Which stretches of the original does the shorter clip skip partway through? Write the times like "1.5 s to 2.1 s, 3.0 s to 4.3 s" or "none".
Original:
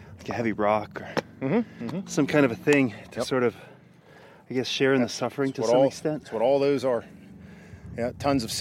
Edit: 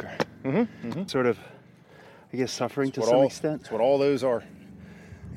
2.1 s to 3.3 s, 4.6 s to 5.1 s

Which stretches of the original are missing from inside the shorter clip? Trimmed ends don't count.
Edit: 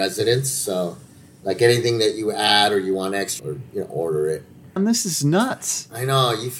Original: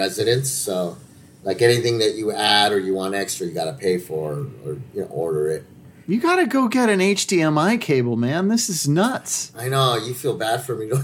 3.4 s to 4.6 s, 6.0 s to 8.4 s

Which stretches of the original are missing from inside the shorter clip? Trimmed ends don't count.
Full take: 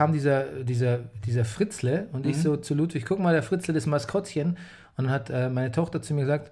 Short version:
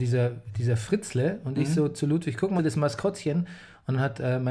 3.2 s to 3.7 s

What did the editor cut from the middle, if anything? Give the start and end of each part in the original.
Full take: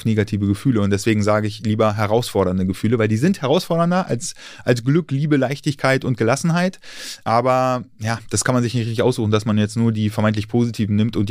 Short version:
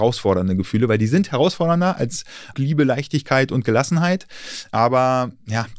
4.6 s to 5.1 s

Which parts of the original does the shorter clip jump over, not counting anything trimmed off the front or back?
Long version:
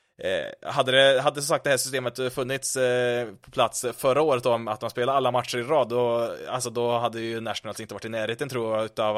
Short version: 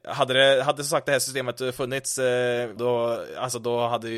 3.3 s to 5.9 s

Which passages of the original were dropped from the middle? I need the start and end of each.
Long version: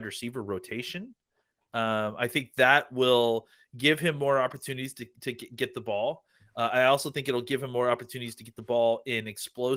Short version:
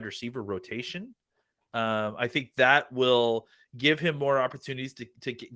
none

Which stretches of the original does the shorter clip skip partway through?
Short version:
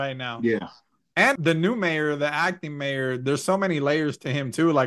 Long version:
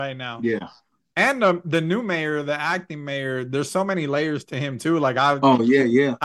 1.4 s to 1.6 s

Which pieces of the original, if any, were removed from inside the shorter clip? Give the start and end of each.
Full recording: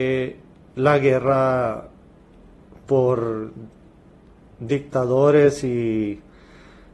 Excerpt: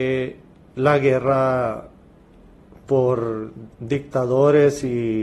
3.7 s to 4.5 s

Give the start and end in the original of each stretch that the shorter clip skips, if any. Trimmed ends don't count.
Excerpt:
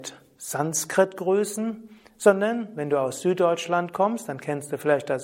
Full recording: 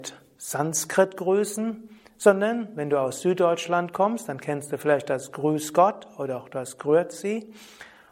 none

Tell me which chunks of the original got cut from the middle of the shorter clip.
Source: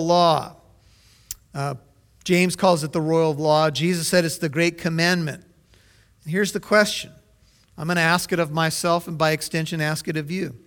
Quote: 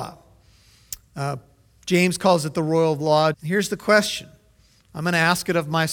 3.7 s to 6.2 s

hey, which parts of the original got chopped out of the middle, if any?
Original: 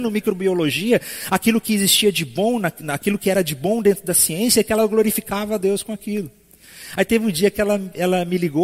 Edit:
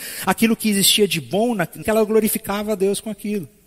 2.9 s to 4.6 s

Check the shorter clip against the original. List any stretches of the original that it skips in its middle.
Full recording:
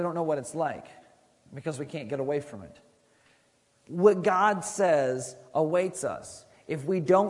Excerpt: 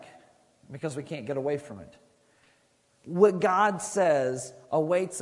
none

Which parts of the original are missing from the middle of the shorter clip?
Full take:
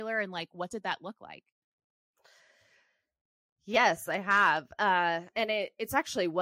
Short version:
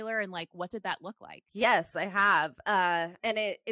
1.5 s to 3.6 s

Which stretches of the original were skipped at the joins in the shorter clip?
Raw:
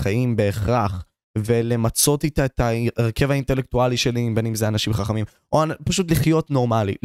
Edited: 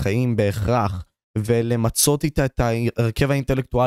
none

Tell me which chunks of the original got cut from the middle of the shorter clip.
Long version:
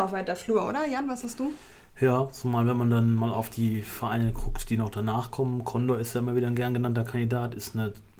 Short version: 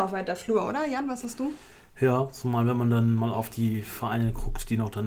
none

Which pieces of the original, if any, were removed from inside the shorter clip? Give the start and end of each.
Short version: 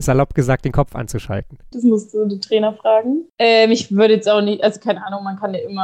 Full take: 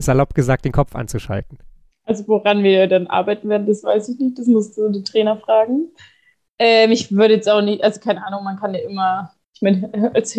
1.7 s to 4.4 s, 5.9 s to 6.5 s

